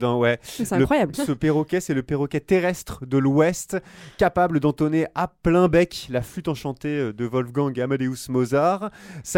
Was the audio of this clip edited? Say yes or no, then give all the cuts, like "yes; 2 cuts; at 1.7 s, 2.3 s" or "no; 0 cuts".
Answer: yes; 1 cut; at 1.1 s